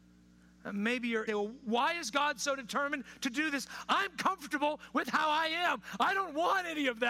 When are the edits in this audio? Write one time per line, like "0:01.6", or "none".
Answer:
0:01.3